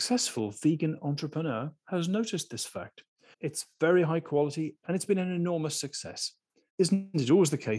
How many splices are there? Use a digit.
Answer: 3